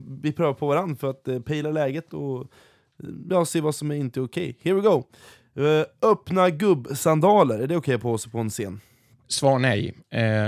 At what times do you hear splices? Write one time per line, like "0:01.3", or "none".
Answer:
none